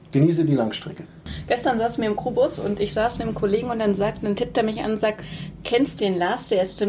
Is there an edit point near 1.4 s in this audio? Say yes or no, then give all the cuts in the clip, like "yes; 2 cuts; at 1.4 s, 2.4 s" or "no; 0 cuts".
no; 1 cut; at 6.0 s